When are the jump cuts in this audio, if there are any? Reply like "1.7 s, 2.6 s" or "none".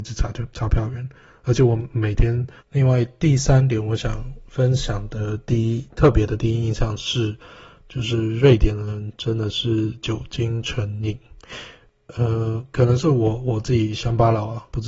2.6 s, 12.7 s